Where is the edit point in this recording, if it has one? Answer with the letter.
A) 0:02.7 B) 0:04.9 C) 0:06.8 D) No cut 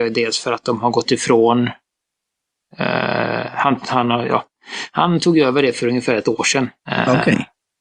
C